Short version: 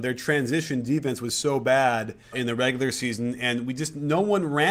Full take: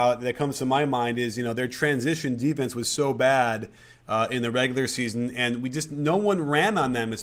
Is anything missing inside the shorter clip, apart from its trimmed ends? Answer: yes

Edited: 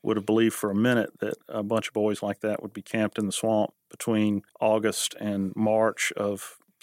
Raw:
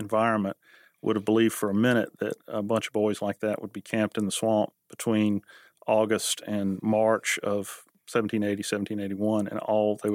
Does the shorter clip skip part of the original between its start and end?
yes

